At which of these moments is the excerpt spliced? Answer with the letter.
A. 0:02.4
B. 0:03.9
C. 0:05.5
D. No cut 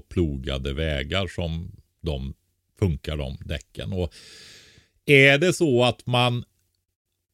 D